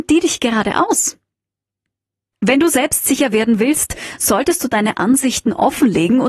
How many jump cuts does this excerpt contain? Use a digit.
1